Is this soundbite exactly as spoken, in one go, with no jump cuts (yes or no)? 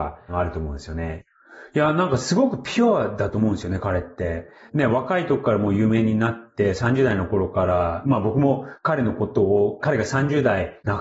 yes